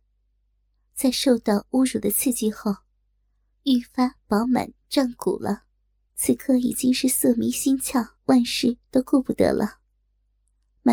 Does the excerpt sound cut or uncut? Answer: cut